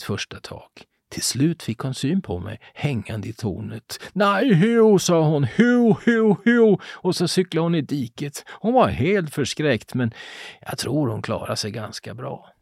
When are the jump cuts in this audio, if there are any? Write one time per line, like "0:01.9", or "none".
none